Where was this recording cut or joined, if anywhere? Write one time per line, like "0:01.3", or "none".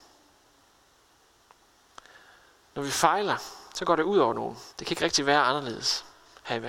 0:04.7